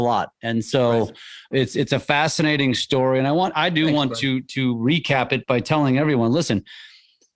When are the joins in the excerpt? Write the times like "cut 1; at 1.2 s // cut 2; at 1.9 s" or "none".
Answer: cut 1; at 3.5 s // cut 2; at 5.4 s